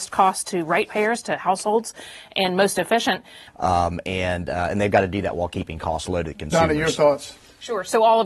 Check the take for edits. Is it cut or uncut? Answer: cut